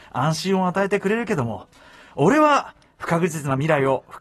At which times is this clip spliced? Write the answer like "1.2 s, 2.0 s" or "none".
none